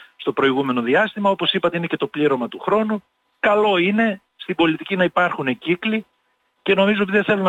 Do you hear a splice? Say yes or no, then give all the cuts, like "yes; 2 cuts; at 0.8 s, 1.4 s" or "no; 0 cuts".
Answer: no; 0 cuts